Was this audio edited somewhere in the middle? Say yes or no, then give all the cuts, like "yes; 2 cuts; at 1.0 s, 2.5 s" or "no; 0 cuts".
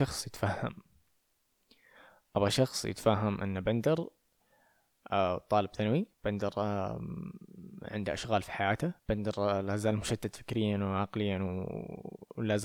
yes; 2 cuts; at 6.1 s, 9.0 s